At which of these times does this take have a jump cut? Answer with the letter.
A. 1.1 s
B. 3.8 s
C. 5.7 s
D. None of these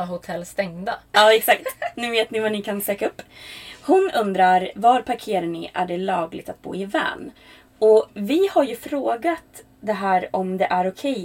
A